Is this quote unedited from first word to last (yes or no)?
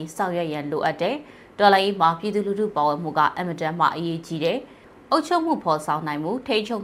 yes